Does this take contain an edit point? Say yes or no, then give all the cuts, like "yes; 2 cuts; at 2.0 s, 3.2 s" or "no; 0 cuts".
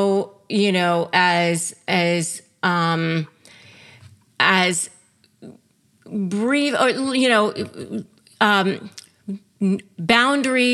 no; 0 cuts